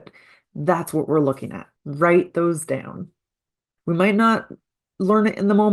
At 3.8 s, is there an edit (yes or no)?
yes